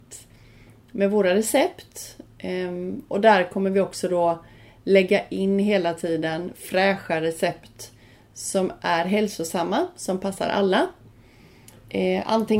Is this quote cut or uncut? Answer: uncut